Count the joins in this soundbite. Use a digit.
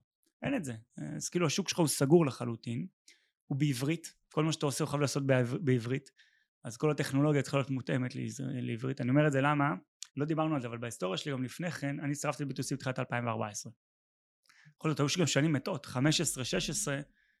1